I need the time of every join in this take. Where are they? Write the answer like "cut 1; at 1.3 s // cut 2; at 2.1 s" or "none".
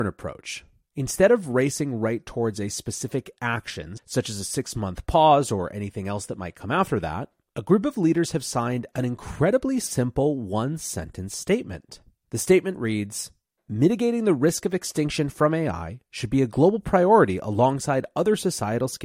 none